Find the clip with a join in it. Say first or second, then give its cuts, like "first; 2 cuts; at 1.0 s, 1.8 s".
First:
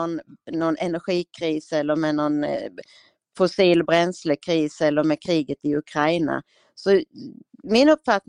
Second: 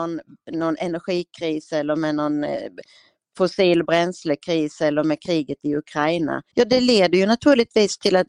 second; 1 cut; at 6.5 s